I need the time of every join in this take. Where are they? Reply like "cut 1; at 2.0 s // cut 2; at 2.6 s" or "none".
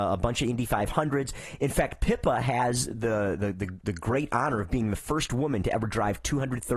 none